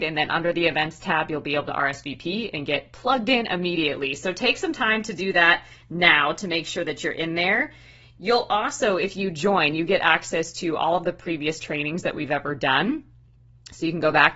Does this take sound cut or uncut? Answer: uncut